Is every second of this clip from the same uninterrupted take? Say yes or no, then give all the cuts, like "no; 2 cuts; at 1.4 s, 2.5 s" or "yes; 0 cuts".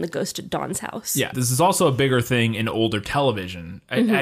no; 1 cut; at 1.3 s